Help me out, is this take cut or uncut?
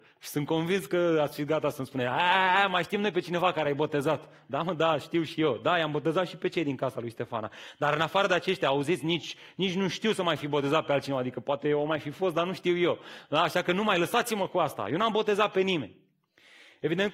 uncut